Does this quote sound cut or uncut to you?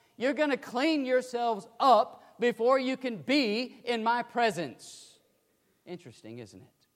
uncut